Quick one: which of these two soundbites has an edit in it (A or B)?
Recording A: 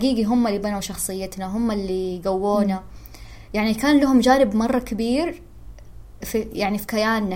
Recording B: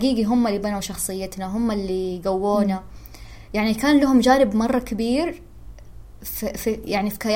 A